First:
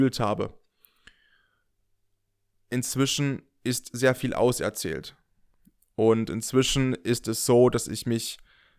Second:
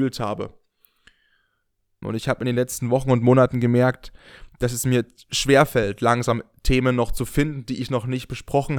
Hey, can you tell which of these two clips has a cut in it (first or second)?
second